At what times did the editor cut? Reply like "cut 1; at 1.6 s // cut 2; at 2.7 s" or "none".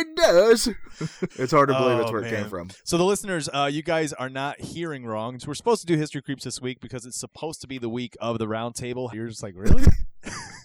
cut 1; at 1.3 s // cut 2; at 5.4 s // cut 3; at 9.1 s